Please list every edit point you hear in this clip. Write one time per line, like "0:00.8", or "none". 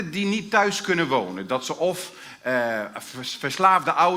none